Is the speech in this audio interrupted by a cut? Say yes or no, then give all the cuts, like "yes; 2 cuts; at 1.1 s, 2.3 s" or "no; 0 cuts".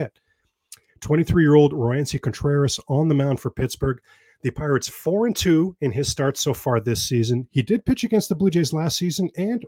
no; 0 cuts